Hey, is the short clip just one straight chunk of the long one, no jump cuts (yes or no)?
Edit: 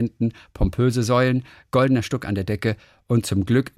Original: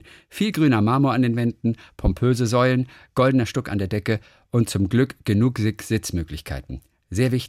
yes